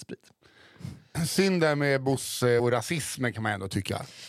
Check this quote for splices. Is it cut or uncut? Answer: cut